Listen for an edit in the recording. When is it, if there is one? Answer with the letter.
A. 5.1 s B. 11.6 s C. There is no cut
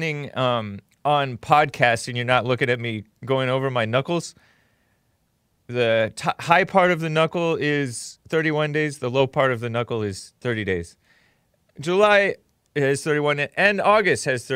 C